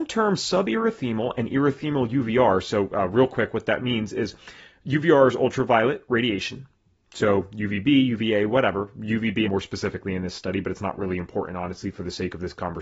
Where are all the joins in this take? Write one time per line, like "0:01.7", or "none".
0:09.4